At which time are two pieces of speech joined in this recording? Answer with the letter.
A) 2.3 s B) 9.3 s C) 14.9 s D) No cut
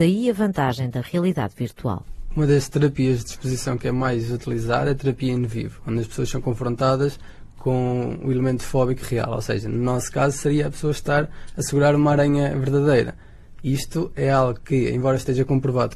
D